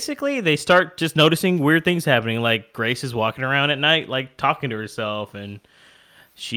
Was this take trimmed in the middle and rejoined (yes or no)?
no